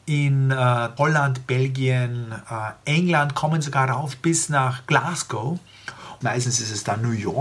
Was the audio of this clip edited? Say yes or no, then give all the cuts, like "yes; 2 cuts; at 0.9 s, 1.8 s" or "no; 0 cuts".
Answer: yes; 2 cuts; at 1.0 s, 6.2 s